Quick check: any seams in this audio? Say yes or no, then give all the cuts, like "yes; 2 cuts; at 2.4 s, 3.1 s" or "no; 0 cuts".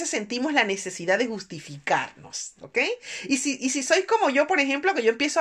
no; 0 cuts